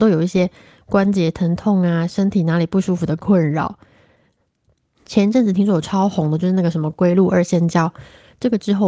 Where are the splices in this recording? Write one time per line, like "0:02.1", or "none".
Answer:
0:04.9